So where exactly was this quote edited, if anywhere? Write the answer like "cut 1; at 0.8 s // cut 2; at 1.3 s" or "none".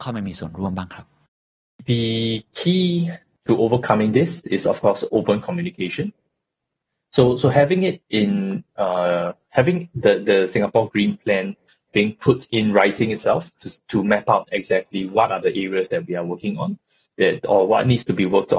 none